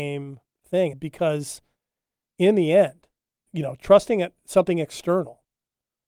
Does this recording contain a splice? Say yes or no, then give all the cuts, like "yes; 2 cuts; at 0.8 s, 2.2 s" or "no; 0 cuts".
yes; 2 cuts; at 0.9 s, 3.5 s